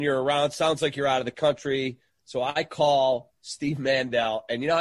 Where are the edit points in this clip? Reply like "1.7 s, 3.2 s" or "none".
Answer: 2.1 s